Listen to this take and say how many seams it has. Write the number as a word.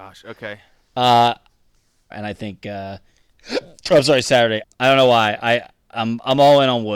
two